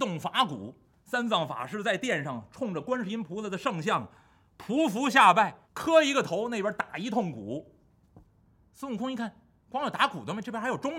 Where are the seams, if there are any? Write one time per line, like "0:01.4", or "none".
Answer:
0:05.6